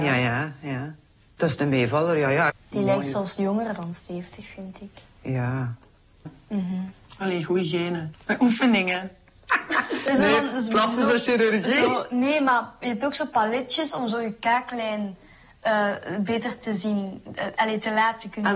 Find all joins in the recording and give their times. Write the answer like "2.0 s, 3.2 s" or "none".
2.5 s, 6.3 s, 8.1 s